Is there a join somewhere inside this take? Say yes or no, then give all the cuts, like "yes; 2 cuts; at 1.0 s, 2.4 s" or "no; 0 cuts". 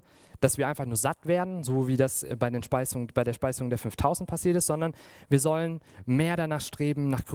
no; 0 cuts